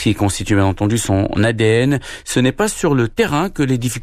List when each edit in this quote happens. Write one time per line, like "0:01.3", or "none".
0:02.2